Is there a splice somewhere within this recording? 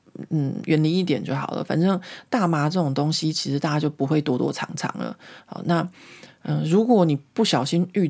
no; 0 cuts

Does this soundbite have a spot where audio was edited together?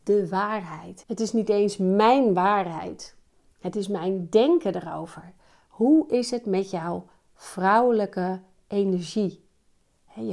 yes; 1 cut; at 1.0 s

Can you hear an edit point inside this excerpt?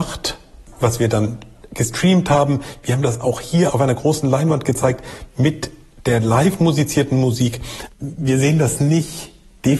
yes; 2 cuts; at 3.7 s, 7.9 s

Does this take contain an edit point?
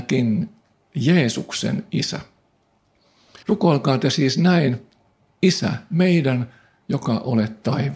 yes; 1 cut; at 3.4 s

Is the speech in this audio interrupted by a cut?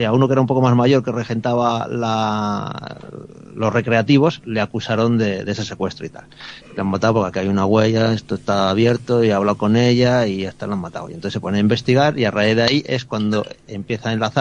yes; 1 cut; at 6.6 s

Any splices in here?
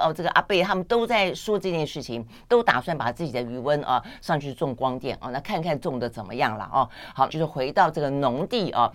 yes; 1 cut; at 7.3 s

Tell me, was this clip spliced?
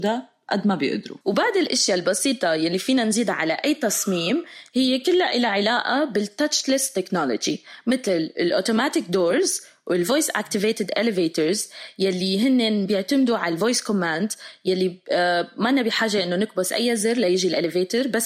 yes; 1 cut; at 1.2 s

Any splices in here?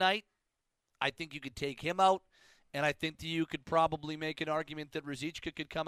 no; 0 cuts

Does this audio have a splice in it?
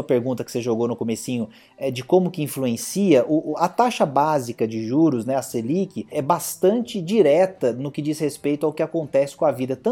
yes; 1 cut; at 6.1 s

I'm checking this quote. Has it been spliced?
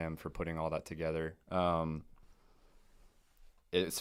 yes; 1 cut; at 1.5 s

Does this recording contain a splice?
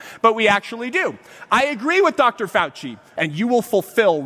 yes; 1 cut; at 3.2 s

